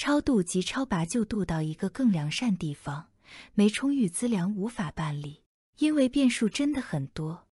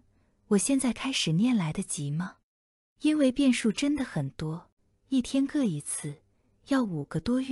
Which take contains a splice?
first; 1 cut; at 5.6 s

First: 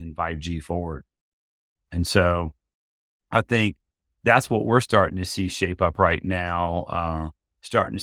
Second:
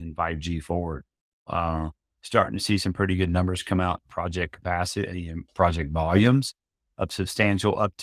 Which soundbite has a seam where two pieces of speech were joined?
second; 1 cut; at 1.5 s

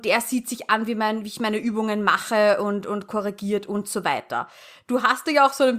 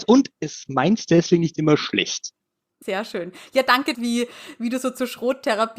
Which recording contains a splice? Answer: second; 2 cuts; at 2.8 s, 3.9 s

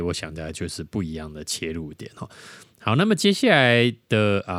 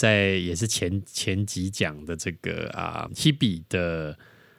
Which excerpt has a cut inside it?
second; 1 cut; at 3.1 s

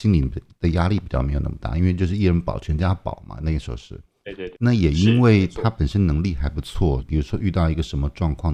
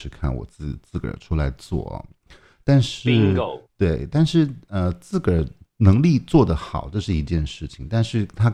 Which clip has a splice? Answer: first; 2 cuts; at 4.5 s, 7.0 s

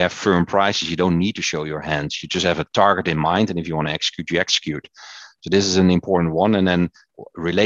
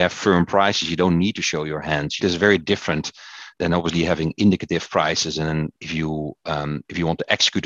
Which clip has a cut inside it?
second; 2 cuts; at 2.2 s, 5.7 s

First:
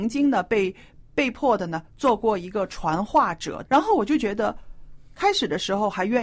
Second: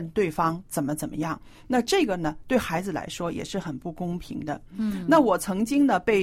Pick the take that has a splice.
first; 2 cuts; at 1.0 s, 3.7 s

